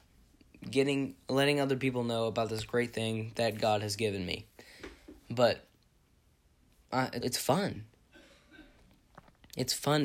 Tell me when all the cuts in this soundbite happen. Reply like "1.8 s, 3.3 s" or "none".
7.2 s